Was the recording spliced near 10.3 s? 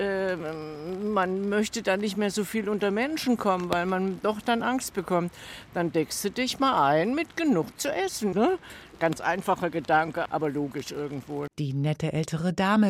yes; 3 cuts; at 8.3 s, 10.3 s, 11.5 s

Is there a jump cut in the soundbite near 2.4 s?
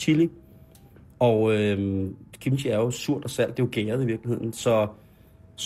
no; 0 cuts

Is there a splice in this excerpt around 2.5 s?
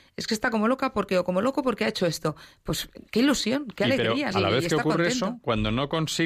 no; 1 cut; at 4.3 s

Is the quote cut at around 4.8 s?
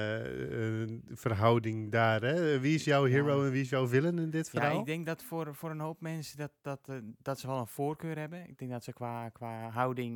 no; 0 cuts

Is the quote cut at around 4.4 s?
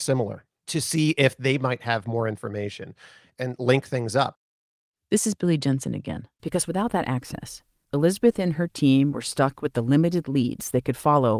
no; 1 cut; at 6.4 s

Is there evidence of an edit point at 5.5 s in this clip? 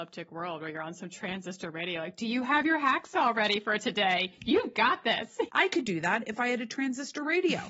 yes; 1 cut; at 5.5 s

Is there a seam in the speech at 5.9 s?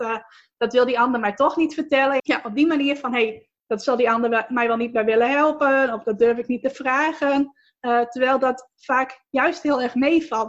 no; 1 cut; at 2.2 s

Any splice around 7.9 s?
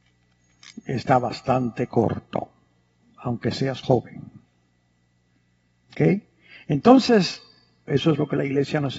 yes; 1 cut; at 7.9 s

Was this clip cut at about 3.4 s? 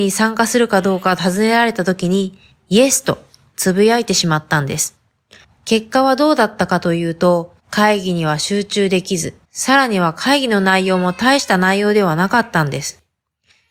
no; 3 cuts; at 5.4 s, 7.6 s, 9.4 s

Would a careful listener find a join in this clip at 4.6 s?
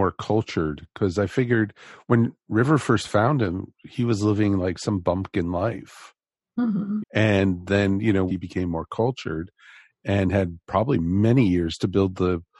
no; 2 cuts; at 7.0 s, 8.3 s

